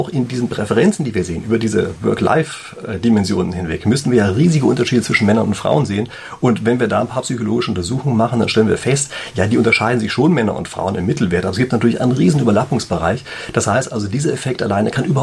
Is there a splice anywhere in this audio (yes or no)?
no